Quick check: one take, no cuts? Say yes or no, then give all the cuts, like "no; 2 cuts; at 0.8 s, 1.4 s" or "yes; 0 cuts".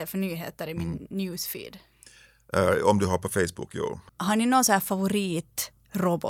no; 1 cut; at 4.1 s